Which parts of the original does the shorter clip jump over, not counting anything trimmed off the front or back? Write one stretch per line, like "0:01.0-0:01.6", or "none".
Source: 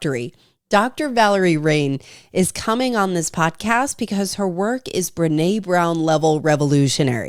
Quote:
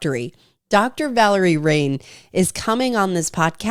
none